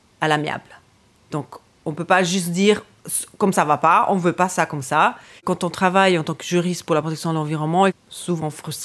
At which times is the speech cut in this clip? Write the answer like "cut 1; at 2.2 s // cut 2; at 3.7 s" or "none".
cut 1; at 3.5 s // cut 2; at 5.4 s // cut 3; at 7.9 s